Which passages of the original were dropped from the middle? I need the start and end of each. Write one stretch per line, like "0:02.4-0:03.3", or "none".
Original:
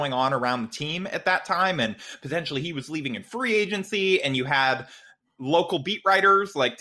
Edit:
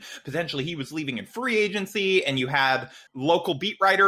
0:05.0-0:05.3